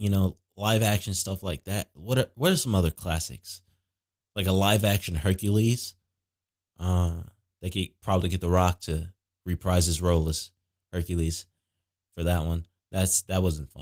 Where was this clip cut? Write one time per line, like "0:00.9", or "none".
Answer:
none

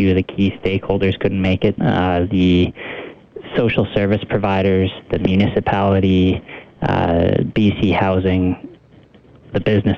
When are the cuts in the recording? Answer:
0:01.8

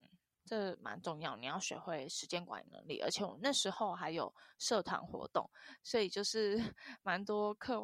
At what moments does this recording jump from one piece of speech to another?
none

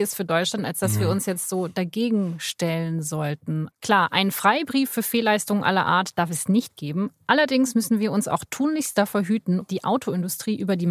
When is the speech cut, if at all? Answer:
0:03.7
0:09.6

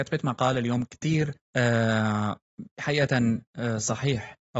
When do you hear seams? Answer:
0:01.4

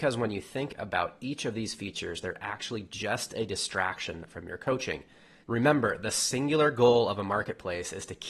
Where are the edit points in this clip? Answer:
0:05.4

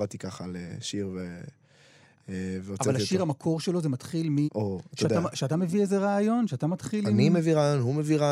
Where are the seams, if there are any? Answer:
0:04.4

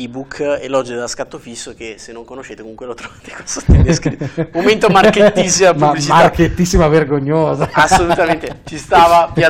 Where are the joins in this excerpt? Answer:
none

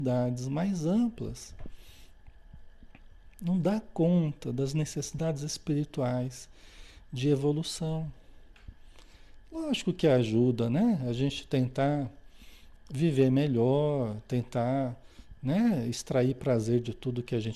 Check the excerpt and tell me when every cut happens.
none

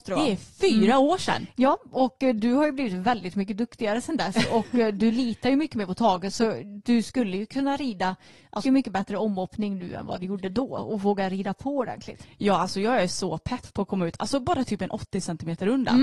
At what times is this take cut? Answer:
0:08.7

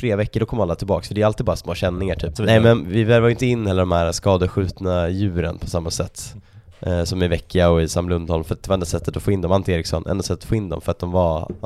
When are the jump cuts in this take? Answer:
0:02.4

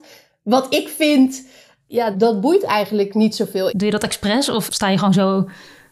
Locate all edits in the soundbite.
0:02.1
0:03.7

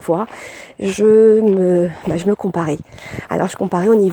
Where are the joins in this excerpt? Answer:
none

